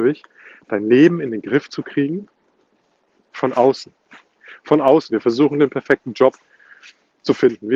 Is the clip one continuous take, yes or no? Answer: no